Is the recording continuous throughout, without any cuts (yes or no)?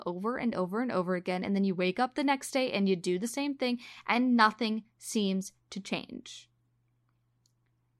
yes